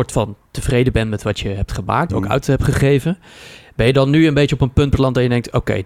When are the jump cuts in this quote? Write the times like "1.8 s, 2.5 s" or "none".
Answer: 2.1 s